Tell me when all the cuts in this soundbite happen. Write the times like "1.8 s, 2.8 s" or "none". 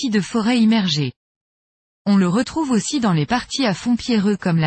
none